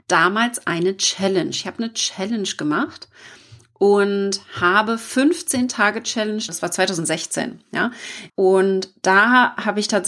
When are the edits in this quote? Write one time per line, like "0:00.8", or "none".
0:06.5
0:08.3